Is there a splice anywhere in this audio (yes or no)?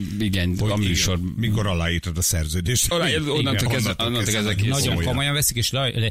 no